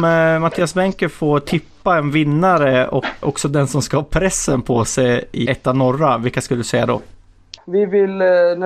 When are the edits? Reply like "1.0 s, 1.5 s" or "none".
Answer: 3.2 s, 5.5 s, 7.6 s